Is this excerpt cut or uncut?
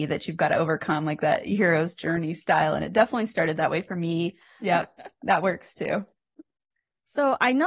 cut